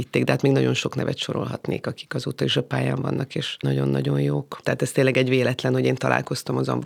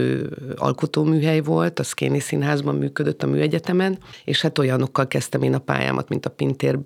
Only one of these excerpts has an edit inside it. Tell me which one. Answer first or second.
first